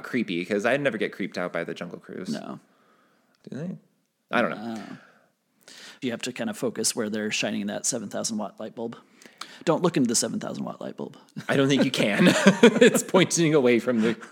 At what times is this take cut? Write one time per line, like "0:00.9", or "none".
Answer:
0:03.4
0:06.0